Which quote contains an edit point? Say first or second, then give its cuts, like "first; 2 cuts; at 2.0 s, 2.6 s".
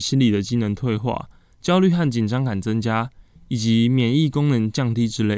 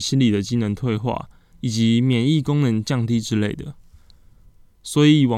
second; 1 cut; at 1.5 s